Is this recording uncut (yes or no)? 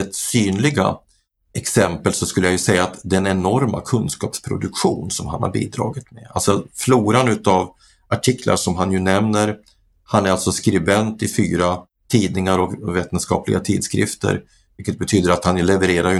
yes